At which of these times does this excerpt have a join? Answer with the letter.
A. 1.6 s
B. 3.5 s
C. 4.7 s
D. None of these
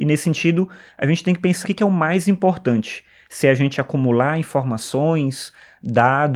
A